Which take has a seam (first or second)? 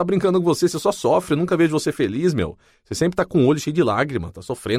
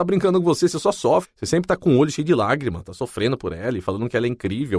second